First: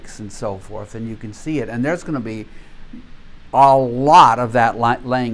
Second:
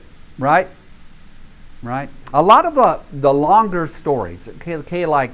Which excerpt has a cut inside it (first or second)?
second